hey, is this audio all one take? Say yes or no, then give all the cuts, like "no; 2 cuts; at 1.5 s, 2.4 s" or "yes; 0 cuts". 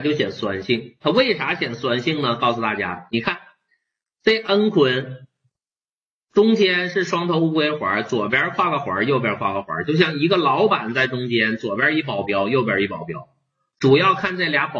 yes; 0 cuts